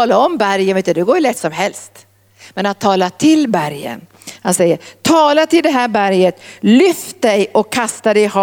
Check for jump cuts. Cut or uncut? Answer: uncut